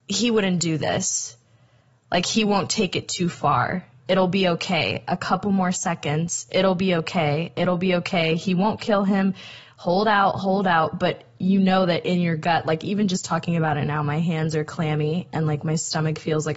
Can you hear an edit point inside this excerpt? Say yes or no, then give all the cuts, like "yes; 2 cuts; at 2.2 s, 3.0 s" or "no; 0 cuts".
yes; 1 cut; at 4.0 s